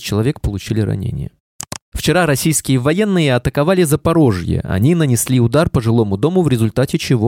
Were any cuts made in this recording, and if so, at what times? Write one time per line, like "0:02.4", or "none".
none